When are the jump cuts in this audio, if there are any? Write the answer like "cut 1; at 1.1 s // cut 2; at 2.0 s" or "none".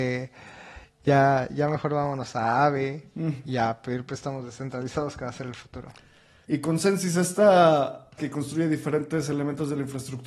cut 1; at 6.4 s // cut 2; at 8.2 s